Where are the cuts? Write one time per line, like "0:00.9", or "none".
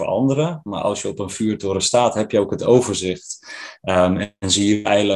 none